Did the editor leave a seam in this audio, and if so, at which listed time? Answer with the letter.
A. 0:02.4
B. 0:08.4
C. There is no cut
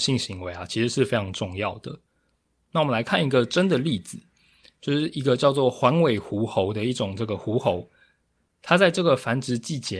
C